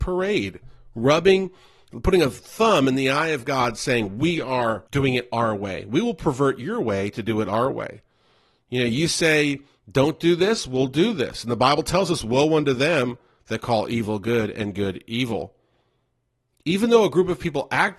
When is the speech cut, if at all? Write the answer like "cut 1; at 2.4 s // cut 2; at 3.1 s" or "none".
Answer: cut 1; at 4.9 s